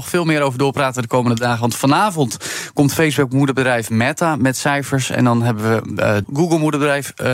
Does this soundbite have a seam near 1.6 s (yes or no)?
no